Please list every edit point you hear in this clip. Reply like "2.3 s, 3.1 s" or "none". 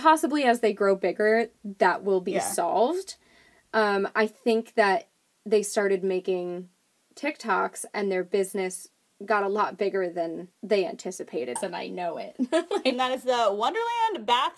10.5 s, 11.6 s